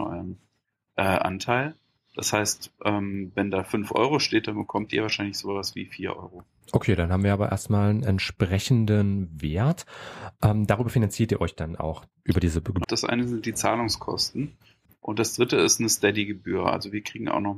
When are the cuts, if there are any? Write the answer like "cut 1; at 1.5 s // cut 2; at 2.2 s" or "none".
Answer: cut 1; at 12.8 s // cut 2; at 14.9 s